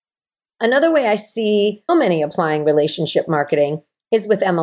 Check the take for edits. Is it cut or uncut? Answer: cut